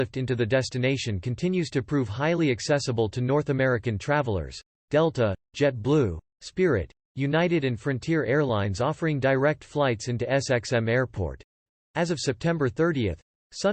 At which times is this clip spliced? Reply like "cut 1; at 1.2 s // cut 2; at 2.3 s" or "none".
cut 1; at 4.8 s